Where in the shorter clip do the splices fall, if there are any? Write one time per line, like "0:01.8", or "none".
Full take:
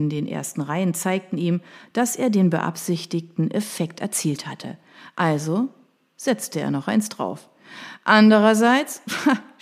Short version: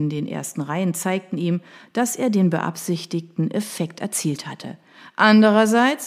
0:05.1